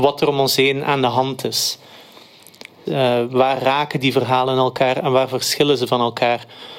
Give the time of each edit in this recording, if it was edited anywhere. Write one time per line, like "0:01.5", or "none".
0:02.9